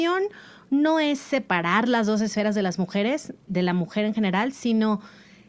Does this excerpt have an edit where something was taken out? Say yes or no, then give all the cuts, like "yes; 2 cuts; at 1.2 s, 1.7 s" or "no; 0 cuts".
yes; 1 cut; at 3.5 s